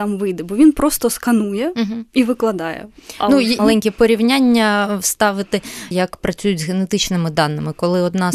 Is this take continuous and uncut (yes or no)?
no